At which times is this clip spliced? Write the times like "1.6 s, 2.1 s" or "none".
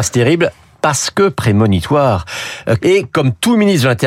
2.8 s